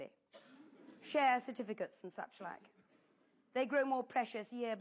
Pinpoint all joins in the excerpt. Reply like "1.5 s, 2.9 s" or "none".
none